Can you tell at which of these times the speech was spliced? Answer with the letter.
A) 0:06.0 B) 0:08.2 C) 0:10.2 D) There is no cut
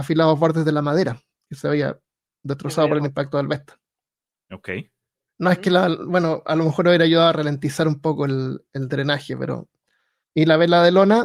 C